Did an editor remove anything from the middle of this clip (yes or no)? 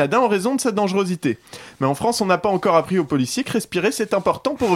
no